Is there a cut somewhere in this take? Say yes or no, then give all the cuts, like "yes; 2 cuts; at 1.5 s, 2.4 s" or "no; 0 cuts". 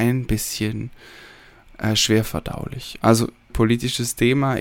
yes; 1 cut; at 3.5 s